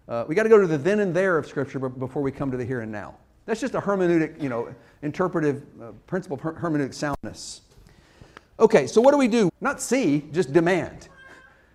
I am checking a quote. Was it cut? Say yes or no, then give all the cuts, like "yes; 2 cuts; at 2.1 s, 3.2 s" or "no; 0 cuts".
yes; 1 cut; at 9.5 s